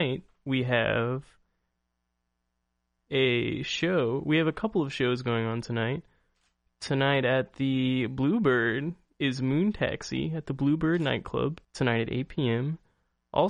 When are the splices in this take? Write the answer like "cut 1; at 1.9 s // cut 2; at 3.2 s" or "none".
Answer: cut 1; at 11.6 s